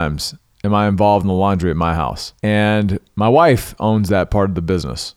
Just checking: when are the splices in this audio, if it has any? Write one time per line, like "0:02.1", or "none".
0:02.4